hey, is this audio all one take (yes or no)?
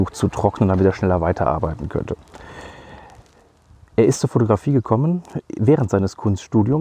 yes